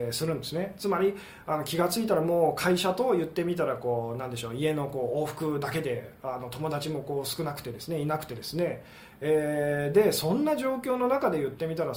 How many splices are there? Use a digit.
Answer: 0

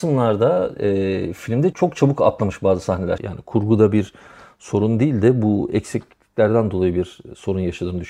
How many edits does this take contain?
2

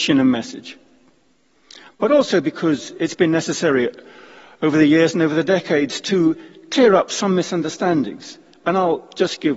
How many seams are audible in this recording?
0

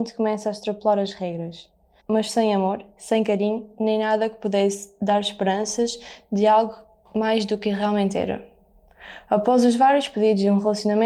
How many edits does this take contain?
1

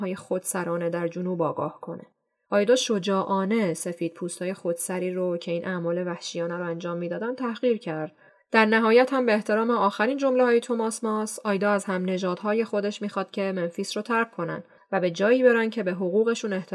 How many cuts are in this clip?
0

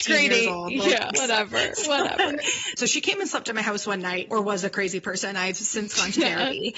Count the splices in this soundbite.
3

